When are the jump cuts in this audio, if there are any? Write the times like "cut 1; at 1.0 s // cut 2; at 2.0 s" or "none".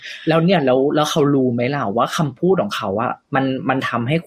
cut 1; at 3.2 s